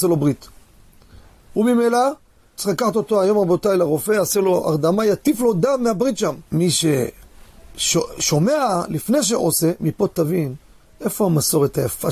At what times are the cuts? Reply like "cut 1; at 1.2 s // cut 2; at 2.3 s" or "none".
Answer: cut 1; at 2.6 s // cut 2; at 6.4 s